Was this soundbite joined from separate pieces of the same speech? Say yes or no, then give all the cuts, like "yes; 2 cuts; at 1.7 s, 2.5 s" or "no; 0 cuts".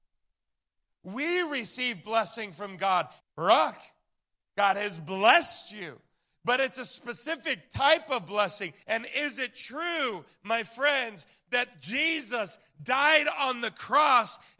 yes; 2 cuts; at 3.2 s, 8.8 s